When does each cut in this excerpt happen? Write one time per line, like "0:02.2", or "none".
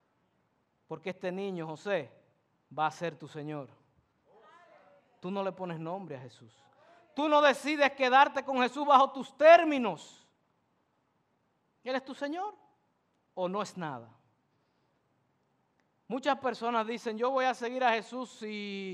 0:11.8

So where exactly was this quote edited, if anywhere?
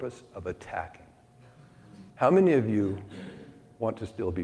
0:02.1

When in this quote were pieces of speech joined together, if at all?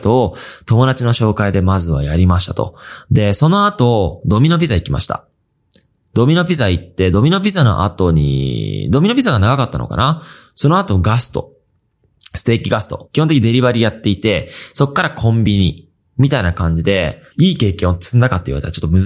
0:13.1
0:17.3

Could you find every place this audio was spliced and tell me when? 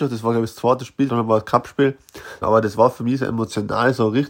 0:01.1
0:02.4

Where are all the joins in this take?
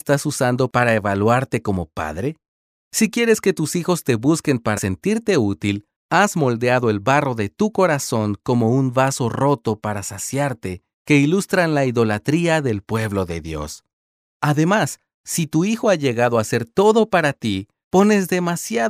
0:04.8
0:10.9

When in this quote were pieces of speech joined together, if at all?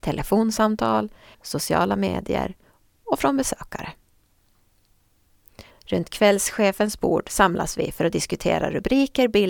0:01.3
0:05.7

